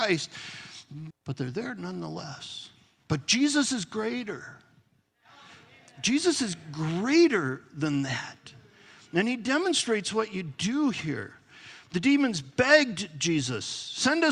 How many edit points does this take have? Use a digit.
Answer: 1